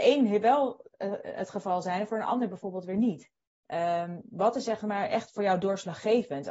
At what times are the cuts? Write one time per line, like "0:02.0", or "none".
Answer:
0:03.5